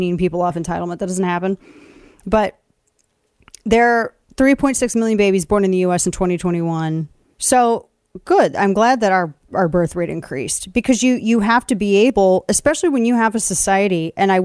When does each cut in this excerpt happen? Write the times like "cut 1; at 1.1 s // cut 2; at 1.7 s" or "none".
cut 1; at 7.3 s